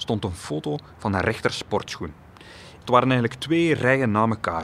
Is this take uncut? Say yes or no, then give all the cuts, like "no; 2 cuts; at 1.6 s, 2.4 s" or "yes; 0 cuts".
no; 1 cut; at 2.8 s